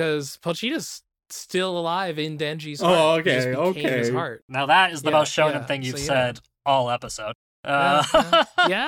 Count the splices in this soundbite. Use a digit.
0